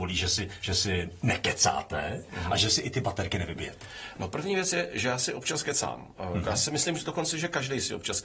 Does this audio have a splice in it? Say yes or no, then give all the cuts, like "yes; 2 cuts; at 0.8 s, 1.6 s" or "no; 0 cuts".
no; 0 cuts